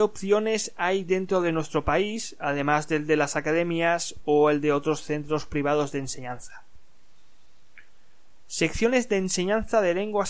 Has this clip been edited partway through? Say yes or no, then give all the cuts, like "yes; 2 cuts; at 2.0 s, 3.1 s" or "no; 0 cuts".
no; 0 cuts